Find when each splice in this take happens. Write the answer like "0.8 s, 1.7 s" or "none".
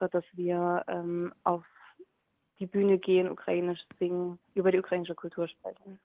4.5 s